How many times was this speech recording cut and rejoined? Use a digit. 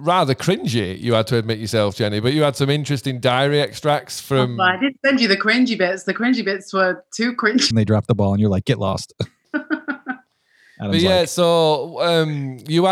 1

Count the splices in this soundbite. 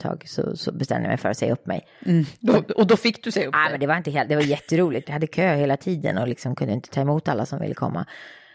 1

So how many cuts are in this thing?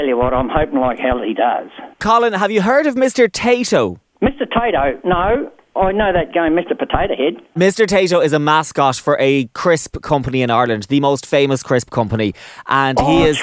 1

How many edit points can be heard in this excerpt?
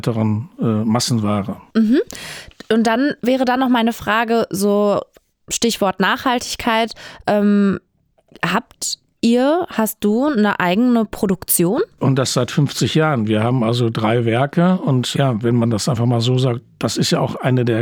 1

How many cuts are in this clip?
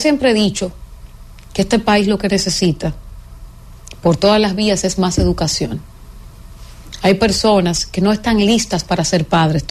0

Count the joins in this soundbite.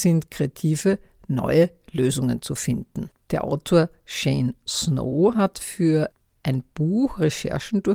1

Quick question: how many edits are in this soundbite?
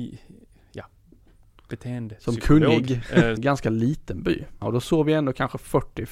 2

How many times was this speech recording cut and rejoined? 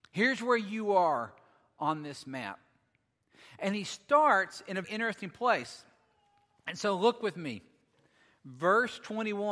1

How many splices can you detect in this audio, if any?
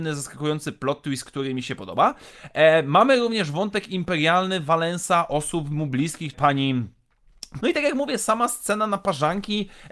2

